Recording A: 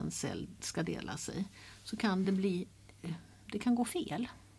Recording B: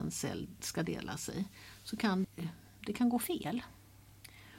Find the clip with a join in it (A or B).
B